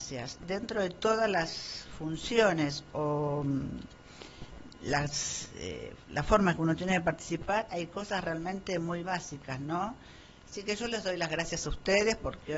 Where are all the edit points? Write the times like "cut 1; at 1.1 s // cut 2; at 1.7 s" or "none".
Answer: cut 1; at 10.4 s